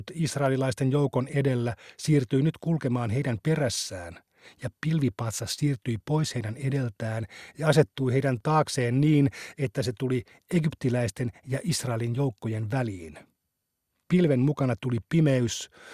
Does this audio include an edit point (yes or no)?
no